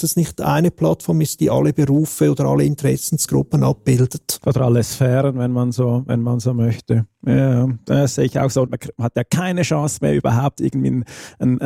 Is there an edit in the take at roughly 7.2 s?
no; 1 cut; at 8.7 s

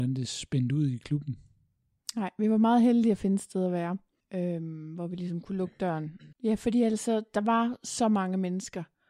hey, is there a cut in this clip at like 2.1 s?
no; 2 cuts; at 4.2 s, 6.3 s

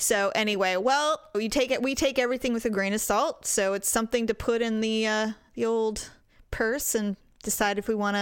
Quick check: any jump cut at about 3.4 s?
no; 1 cut; at 1.3 s

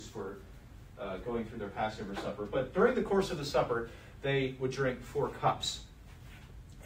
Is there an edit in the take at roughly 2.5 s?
no; 0 cuts

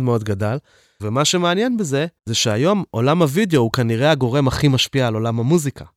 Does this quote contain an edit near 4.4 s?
no; 2 cuts; at 1.0 s, 2.2 s

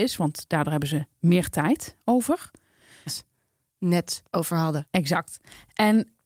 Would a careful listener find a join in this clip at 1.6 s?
no; 2 cuts; at 3.1 s, 4.3 s

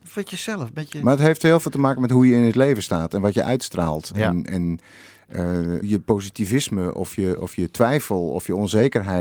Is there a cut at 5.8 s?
yes; 1 cut; at 5.8 s

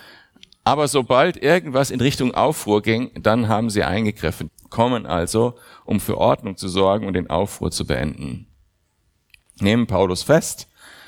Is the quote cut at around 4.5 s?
yes; 1 cut; at 4.5 s

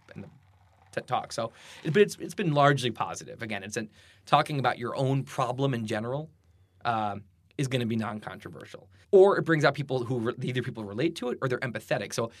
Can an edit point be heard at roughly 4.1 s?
no; 1 cut; at 9.0 s

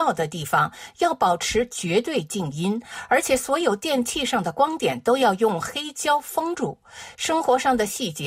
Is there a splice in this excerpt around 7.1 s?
yes; 1 cut; at 7.1 s

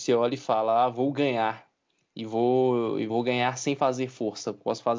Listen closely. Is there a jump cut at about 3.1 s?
yes; 1 cut; at 3.1 s

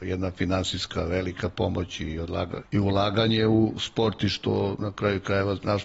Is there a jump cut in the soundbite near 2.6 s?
yes; 1 cut; at 2.6 s

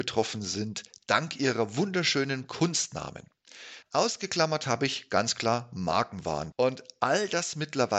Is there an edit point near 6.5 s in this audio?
yes; 2 cuts; at 3.8 s, 6.5 s

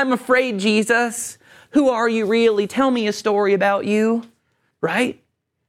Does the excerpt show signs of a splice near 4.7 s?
yes; 1 cut; at 4.7 s

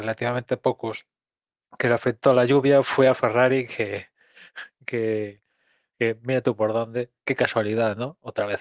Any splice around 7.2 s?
no; 0 cuts

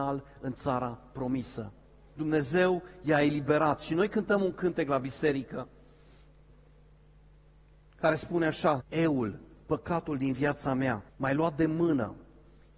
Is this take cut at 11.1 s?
yes; 3 cuts; at 2.1 s, 8.8 s, 11.1 s

